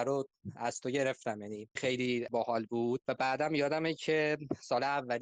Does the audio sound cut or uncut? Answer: cut